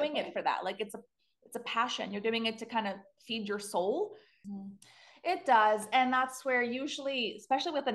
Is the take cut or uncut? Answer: cut